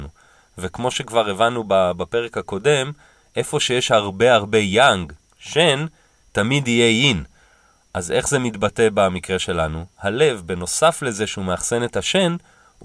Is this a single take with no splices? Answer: yes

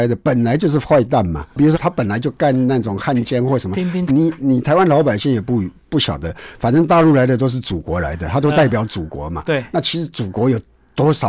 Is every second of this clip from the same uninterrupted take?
no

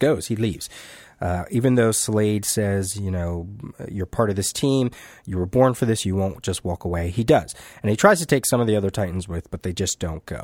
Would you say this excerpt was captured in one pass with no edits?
yes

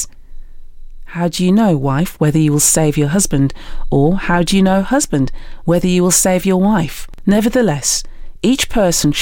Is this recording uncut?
yes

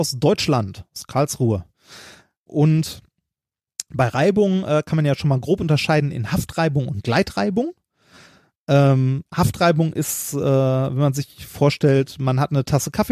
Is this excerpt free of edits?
no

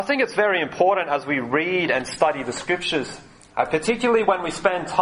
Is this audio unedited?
yes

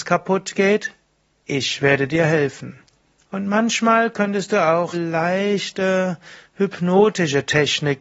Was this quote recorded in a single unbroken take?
no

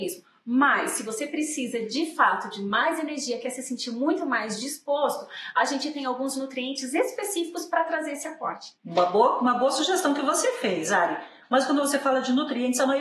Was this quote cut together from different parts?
yes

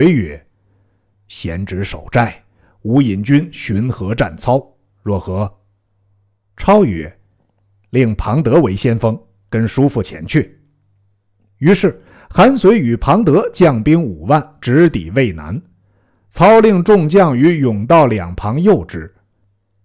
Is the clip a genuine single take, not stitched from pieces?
yes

